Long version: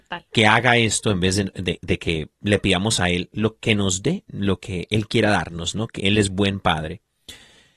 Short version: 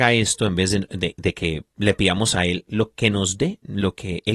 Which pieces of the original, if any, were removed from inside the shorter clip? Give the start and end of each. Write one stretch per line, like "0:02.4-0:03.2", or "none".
none